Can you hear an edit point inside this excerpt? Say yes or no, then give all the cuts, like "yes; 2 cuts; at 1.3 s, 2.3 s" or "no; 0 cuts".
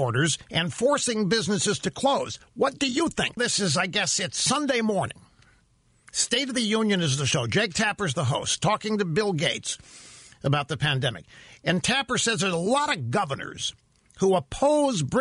yes; 1 cut; at 3.4 s